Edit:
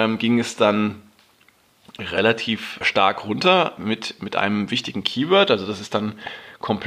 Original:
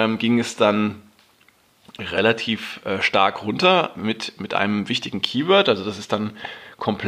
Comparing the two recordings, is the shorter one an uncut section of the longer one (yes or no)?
no